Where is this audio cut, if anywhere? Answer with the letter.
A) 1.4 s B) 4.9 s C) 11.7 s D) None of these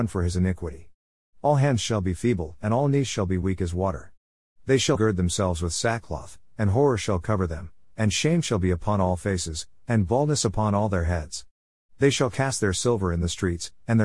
B